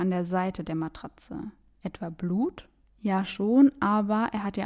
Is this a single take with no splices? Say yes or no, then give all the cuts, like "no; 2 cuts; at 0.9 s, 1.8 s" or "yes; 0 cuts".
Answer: no; 1 cut; at 2.8 s